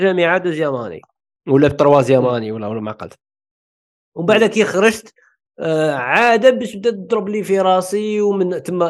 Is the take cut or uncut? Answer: uncut